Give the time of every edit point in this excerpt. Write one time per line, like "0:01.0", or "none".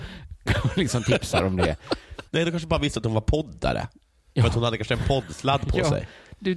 0:02.3